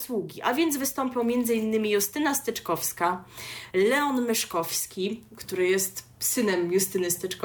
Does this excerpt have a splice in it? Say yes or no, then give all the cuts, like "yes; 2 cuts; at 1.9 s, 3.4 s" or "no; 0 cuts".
no; 0 cuts